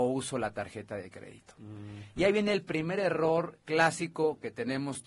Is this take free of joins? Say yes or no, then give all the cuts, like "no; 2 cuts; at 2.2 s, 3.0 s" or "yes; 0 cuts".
yes; 0 cuts